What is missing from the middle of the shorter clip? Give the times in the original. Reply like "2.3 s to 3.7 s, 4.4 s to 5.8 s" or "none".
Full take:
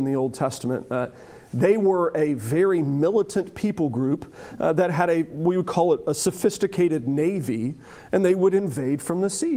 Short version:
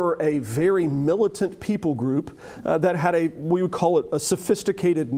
none